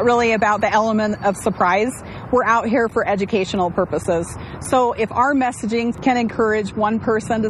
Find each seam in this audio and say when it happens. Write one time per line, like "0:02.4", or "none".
none